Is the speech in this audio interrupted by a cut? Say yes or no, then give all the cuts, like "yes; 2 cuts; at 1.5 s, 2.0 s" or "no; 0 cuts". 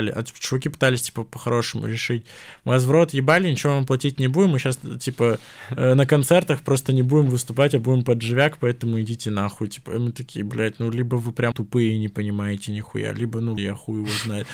yes; 2 cuts; at 11.5 s, 13.6 s